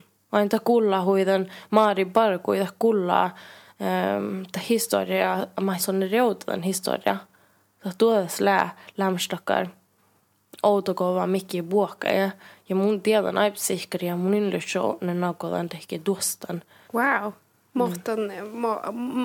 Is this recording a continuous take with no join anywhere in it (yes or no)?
no